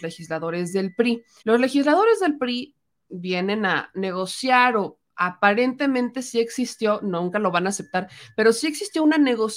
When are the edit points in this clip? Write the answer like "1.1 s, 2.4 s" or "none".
1.4 s